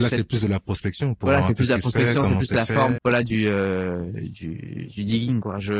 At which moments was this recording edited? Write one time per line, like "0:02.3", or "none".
0:03.0